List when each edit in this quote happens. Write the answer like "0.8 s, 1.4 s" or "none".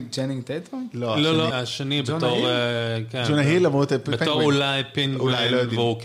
1.5 s

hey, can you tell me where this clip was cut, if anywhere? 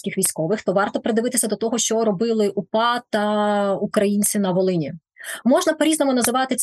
none

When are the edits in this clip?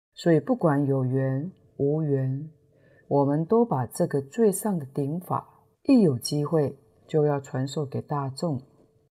3.0 s, 5.7 s

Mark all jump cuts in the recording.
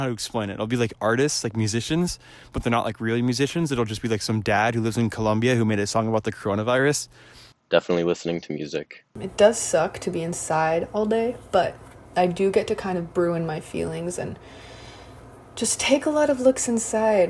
none

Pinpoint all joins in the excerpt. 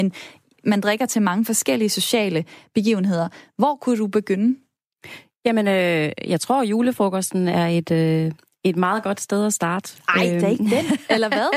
none

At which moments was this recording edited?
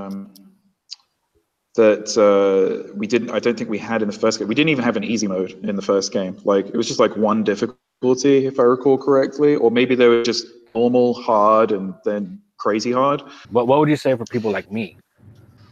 13.4 s

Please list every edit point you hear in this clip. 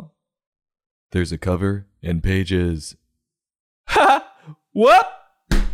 1.0 s, 3.7 s

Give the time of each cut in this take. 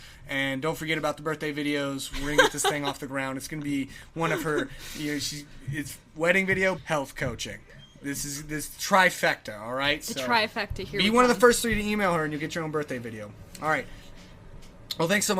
6.8 s

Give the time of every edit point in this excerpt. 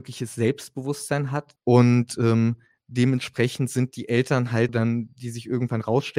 1.6 s, 4.7 s

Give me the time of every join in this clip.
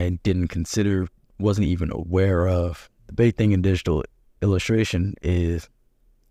3.0 s, 5.2 s

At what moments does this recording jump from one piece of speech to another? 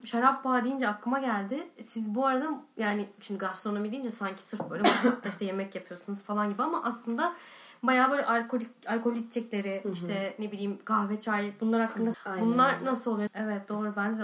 12.1 s, 13.3 s

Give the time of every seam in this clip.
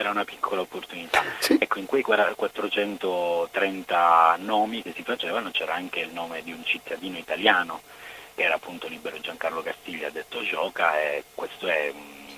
8.3 s

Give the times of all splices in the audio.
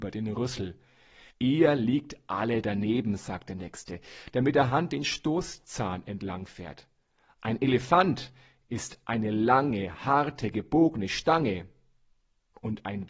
1.3 s

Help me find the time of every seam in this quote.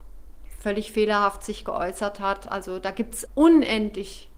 3.3 s

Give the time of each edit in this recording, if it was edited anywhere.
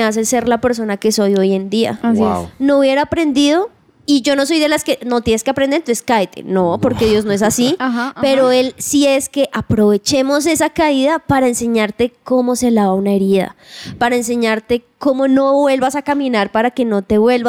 none

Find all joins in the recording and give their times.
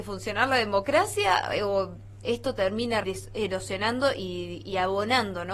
3.0 s

